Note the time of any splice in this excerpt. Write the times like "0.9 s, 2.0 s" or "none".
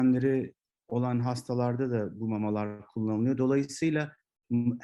none